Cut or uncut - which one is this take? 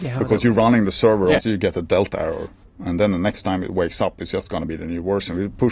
cut